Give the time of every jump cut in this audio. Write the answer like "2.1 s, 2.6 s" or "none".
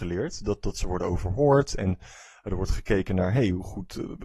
none